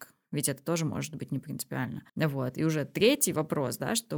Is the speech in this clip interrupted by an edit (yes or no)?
yes